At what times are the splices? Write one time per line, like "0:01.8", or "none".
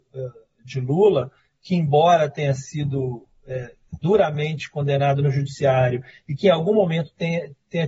none